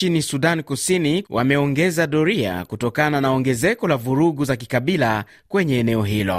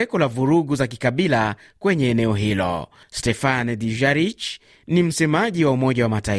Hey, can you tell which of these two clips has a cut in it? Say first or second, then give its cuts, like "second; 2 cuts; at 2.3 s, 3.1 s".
first; 1 cut; at 1.2 s